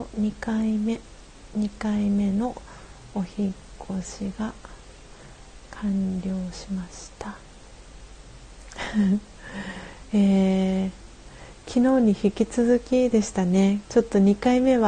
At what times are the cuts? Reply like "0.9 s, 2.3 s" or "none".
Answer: 13.8 s